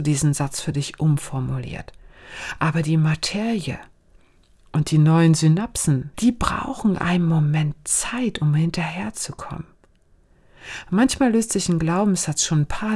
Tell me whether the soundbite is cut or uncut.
cut